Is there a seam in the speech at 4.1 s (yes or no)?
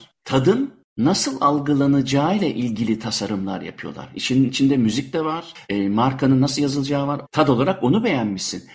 no